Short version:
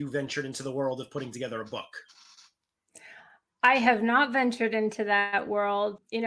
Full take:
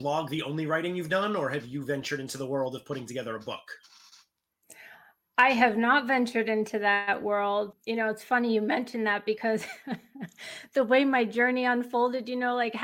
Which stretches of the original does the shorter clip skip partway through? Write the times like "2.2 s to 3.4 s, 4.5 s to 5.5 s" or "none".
none